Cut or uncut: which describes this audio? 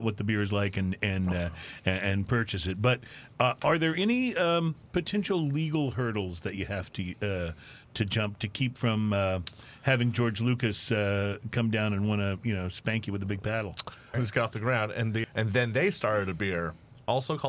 cut